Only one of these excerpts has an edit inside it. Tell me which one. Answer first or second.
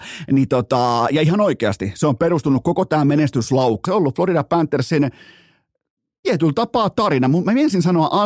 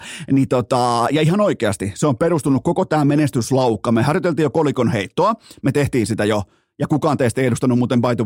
first